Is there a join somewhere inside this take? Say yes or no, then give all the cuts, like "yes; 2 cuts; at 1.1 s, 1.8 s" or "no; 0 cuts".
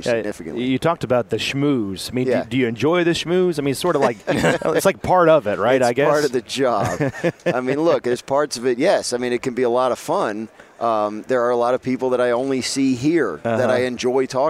no; 0 cuts